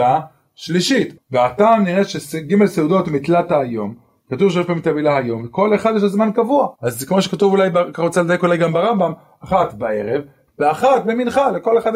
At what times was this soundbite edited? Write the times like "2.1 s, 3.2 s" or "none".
1.2 s, 6.7 s, 10.5 s